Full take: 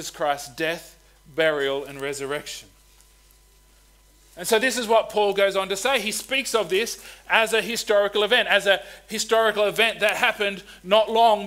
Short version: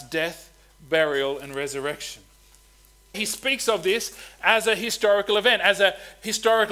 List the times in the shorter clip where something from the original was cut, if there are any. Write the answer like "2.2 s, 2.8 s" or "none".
3.1 s